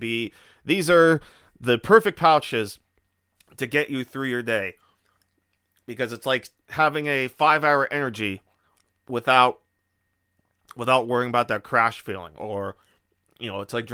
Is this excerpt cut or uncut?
uncut